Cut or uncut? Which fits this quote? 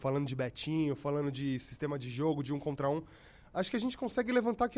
uncut